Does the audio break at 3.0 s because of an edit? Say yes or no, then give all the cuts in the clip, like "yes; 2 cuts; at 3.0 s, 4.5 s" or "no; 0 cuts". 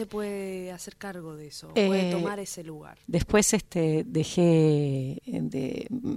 yes; 1 cut; at 3.0 s